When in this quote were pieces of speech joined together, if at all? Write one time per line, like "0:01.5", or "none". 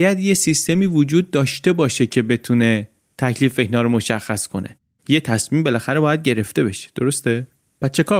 none